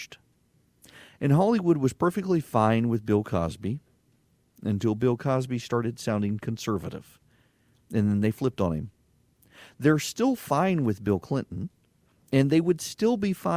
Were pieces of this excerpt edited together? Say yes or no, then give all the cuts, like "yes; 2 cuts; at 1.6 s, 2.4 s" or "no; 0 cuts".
no; 0 cuts